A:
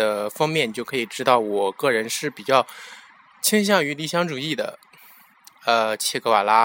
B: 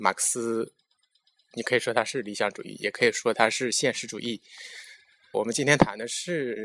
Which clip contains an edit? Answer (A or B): B